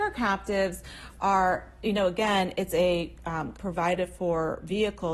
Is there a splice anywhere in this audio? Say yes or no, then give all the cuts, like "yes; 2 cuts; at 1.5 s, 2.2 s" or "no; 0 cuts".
yes; 1 cut; at 3.5 s